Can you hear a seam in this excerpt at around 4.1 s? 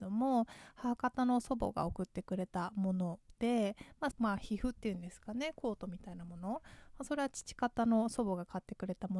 yes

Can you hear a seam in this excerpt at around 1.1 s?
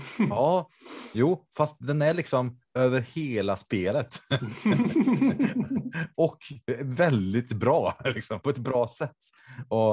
no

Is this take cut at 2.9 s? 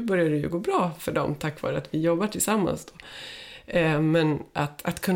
no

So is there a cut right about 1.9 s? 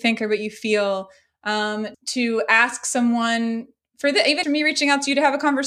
yes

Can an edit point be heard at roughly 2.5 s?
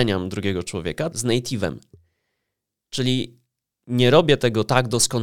no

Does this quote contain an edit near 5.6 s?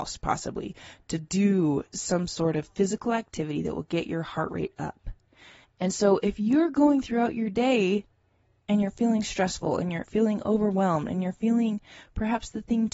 yes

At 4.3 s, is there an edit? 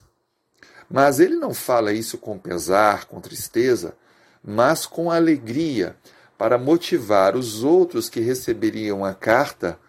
no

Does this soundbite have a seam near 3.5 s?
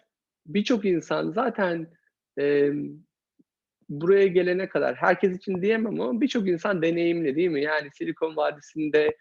no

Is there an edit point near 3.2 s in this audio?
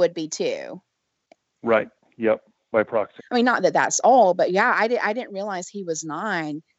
yes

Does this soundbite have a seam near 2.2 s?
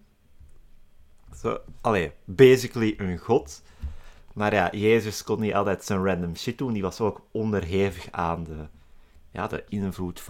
no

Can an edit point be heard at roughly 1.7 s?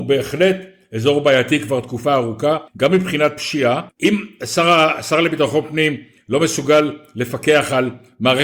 no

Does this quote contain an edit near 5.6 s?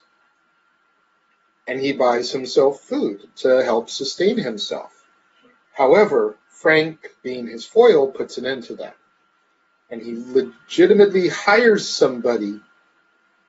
yes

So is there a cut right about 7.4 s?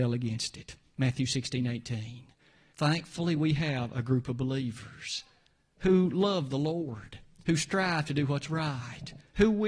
no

